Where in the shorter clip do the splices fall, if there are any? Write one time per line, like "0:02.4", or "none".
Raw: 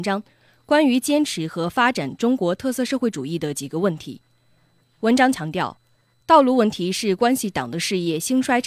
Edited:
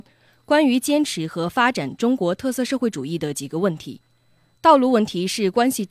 0:04.5